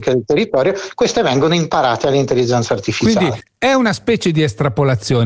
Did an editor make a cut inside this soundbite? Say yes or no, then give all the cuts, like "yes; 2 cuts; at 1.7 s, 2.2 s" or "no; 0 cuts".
no; 0 cuts